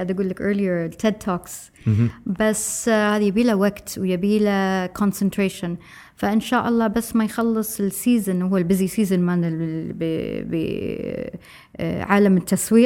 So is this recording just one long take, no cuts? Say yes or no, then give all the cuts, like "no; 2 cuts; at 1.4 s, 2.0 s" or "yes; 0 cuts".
yes; 0 cuts